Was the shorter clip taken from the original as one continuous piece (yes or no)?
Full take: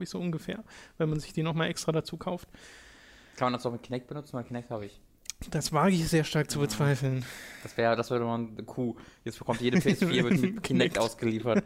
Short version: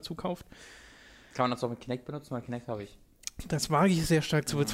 yes